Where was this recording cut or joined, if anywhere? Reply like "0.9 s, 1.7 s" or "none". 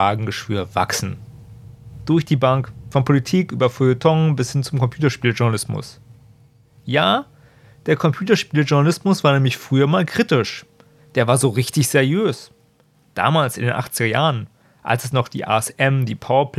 2.9 s